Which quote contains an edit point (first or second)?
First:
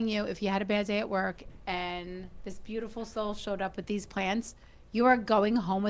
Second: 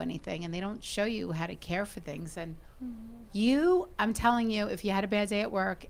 second